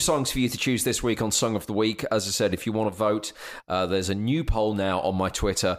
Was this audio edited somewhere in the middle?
no; 0 cuts

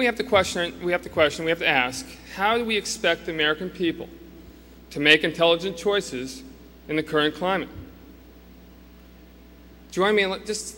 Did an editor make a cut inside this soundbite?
no; 0 cuts

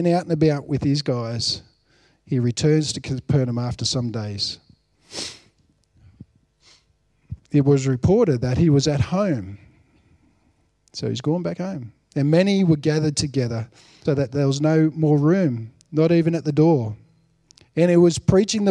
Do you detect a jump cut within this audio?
yes; 1 cut; at 14.1 s

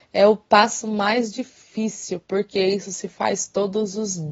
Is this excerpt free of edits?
yes; 0 cuts

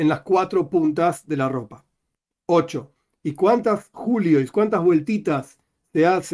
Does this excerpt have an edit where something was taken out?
no; 0 cuts

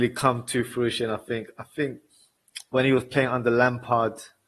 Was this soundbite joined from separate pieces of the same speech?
no; 0 cuts

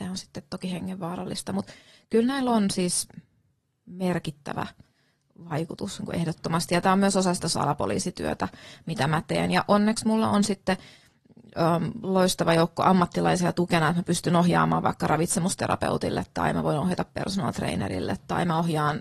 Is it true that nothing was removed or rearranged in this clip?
yes; 0 cuts

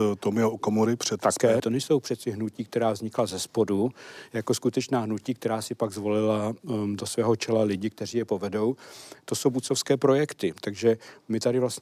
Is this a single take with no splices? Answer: no; 1 cut; at 1.6 s

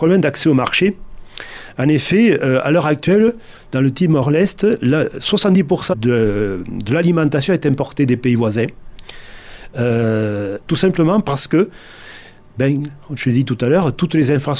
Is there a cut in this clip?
yes; 2 cuts; at 5.9 s, 10.7 s

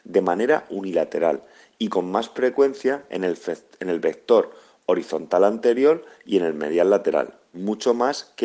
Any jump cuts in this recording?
no; 0 cuts

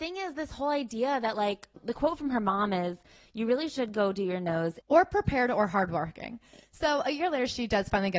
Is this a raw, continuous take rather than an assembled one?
no; 1 cut; at 4.8 s

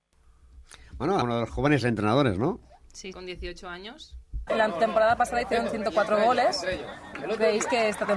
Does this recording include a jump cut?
yes; 3 cuts; at 1.2 s, 3.1 s, 4.5 s

